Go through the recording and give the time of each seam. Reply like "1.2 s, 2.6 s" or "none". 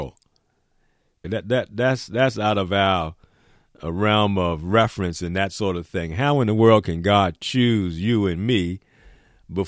1.2 s